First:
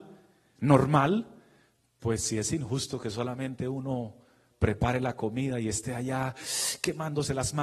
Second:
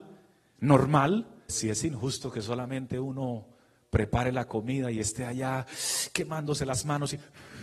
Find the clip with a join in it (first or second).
second